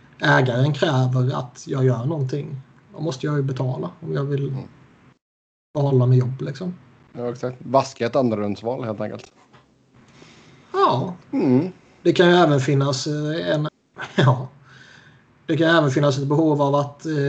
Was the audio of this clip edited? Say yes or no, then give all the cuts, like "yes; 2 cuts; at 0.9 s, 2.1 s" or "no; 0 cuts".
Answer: yes; 2 cuts; at 11.2 s, 13.7 s